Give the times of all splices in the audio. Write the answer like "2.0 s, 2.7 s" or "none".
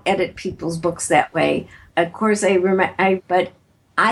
1.9 s, 3.2 s